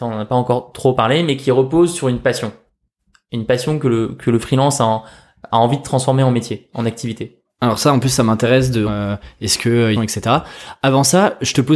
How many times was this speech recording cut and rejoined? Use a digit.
2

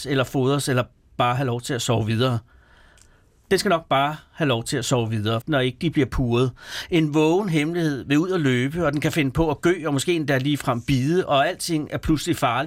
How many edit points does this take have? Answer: 1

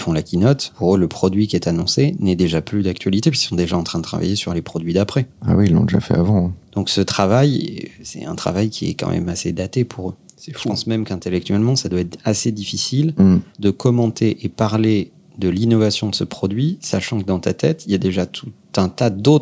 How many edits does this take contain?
0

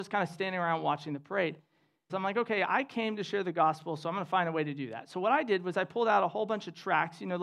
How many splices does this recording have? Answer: 1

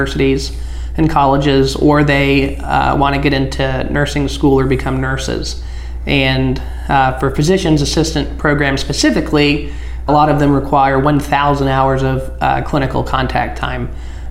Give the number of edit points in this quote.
1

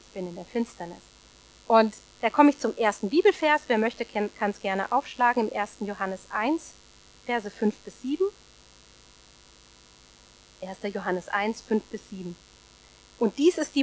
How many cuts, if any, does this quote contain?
1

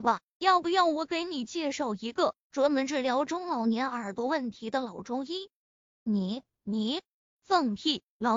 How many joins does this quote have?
1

